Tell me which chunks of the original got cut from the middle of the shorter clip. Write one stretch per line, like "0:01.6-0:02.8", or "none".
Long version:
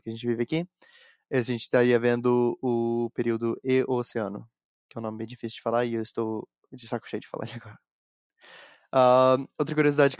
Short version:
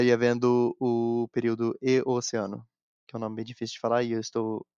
none

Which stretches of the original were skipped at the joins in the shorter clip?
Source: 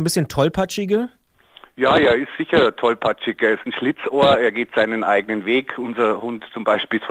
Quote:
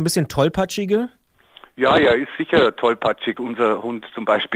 0:03.4-0:05.8

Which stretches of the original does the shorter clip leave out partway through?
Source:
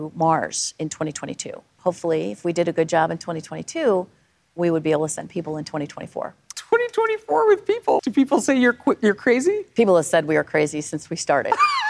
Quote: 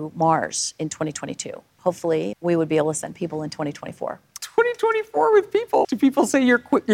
0:02.3-0:04.5

